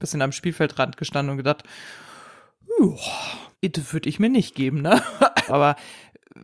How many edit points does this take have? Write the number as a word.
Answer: two